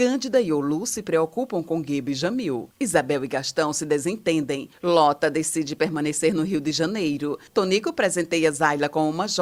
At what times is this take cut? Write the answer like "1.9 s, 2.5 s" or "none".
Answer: none